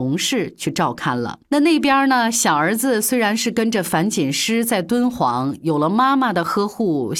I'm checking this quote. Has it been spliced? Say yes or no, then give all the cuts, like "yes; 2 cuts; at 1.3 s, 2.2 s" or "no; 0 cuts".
yes; 1 cut; at 1.4 s